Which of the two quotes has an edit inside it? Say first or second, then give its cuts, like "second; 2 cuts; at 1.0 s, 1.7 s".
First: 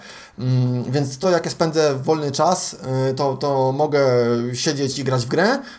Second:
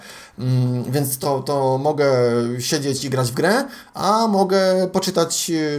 second; 1 cut; at 1.2 s